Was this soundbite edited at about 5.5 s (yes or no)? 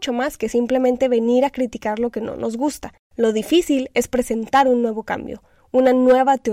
no